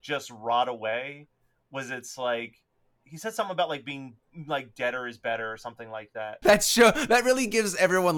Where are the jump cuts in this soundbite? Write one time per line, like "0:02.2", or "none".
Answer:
0:06.4